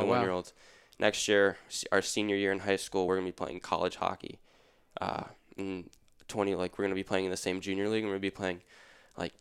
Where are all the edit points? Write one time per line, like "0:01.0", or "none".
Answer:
none